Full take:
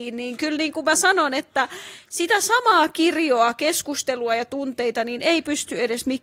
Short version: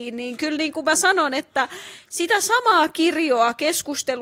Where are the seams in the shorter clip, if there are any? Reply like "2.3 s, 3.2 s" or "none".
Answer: none